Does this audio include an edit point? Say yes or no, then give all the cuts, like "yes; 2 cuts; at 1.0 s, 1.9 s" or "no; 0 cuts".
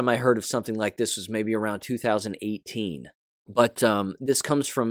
yes; 1 cut; at 3.3 s